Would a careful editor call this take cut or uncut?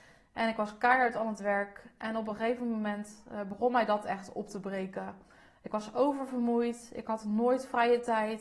uncut